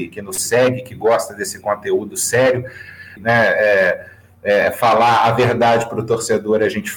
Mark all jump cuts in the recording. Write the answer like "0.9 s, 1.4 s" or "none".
3.2 s